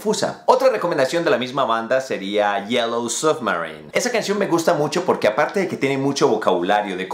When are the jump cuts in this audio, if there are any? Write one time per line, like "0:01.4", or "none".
0:03.9

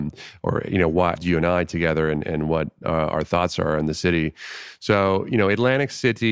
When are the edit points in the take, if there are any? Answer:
0:01.2

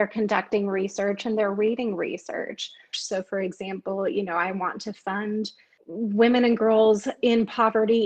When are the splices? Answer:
0:02.9

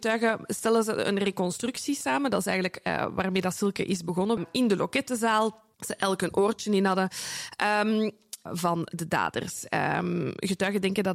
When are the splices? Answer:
0:04.4
0:05.7
0:08.5

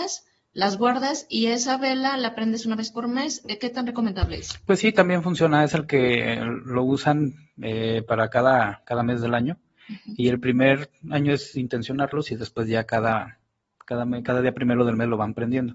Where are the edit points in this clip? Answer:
none

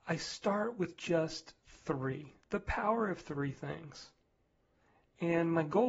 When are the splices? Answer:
none

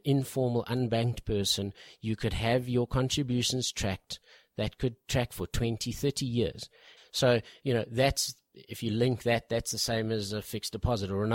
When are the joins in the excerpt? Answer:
0:07.0

